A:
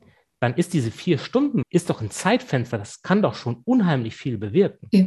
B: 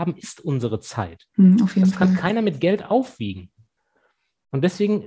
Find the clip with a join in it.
A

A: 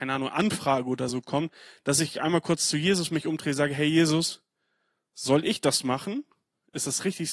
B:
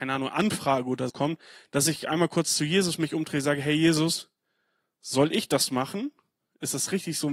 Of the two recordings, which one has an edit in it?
B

